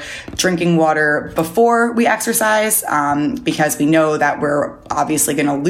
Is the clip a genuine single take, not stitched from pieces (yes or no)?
yes